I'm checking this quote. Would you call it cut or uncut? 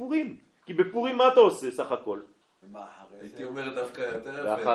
cut